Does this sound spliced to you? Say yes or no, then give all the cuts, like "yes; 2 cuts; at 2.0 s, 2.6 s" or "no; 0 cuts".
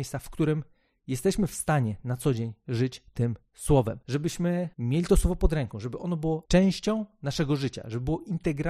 no; 0 cuts